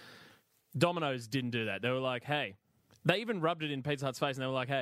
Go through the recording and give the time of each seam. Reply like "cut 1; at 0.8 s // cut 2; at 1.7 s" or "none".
none

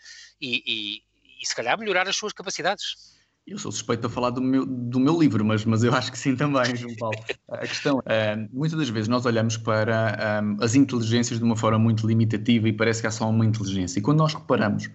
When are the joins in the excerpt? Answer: cut 1; at 8.0 s

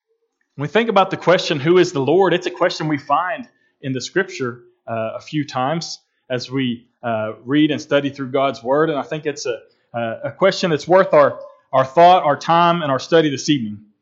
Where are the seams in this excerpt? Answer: none

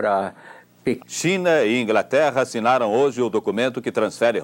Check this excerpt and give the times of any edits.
cut 1; at 1.0 s

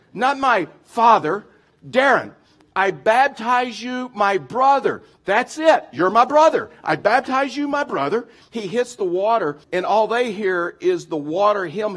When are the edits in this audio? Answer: cut 1; at 8.4 s // cut 2; at 9.6 s

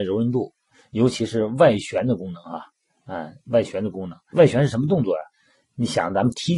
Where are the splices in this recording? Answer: cut 1; at 4.3 s

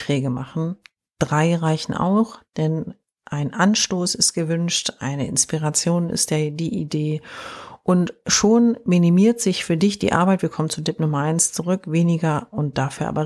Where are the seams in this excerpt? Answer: none

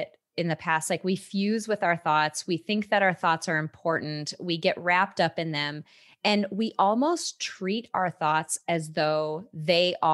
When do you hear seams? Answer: none

